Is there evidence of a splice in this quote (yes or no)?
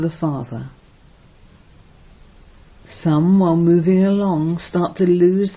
no